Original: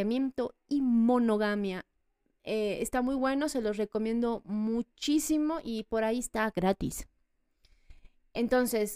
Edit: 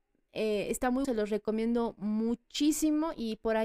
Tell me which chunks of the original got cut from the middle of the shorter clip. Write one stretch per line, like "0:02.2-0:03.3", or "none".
0:03.2-0:03.5